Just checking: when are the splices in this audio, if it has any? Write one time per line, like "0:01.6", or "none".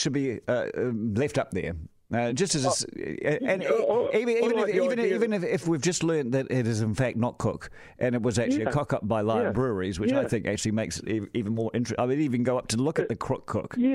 none